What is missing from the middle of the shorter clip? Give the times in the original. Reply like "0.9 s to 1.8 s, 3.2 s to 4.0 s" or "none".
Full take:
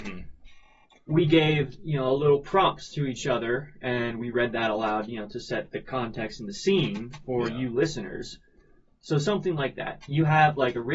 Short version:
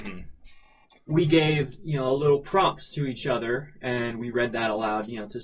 none